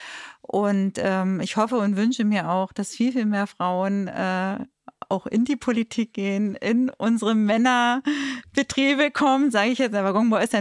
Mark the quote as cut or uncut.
uncut